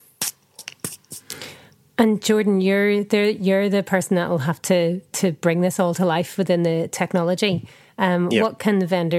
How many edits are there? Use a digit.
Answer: 0